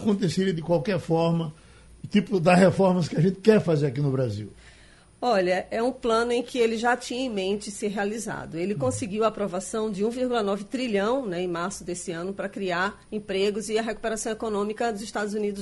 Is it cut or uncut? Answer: uncut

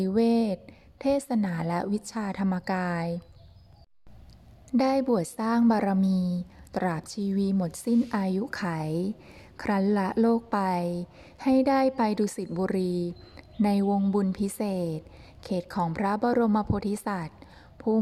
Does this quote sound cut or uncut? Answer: uncut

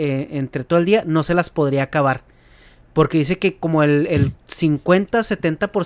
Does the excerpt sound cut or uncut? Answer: uncut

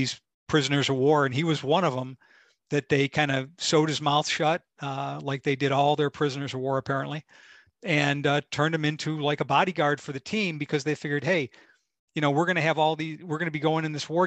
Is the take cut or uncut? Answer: uncut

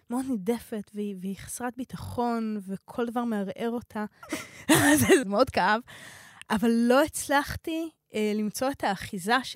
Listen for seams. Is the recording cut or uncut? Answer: cut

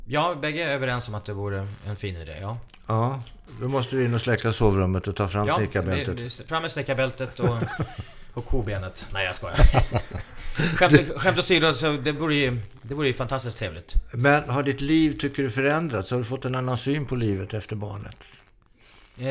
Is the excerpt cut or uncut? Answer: cut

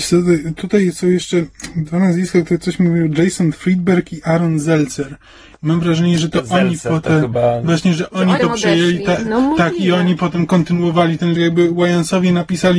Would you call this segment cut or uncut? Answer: cut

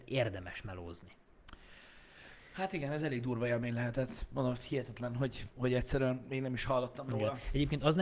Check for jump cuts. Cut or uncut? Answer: uncut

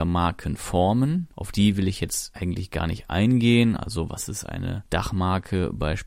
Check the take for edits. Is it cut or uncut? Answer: uncut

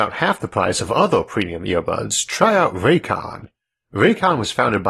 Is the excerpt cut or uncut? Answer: uncut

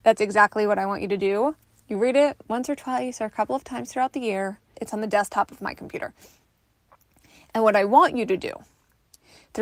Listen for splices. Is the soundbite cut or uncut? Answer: cut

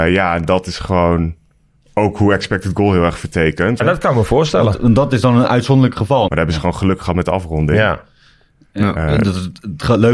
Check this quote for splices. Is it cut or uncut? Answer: cut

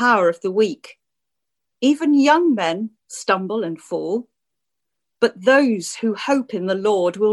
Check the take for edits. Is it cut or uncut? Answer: uncut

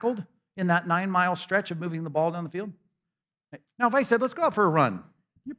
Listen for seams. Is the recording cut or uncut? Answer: cut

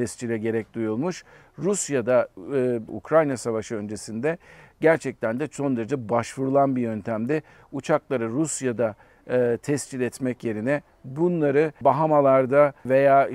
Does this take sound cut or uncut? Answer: cut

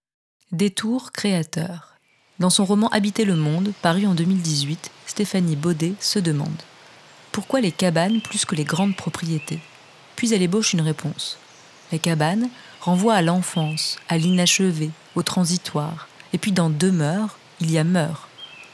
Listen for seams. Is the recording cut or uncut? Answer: uncut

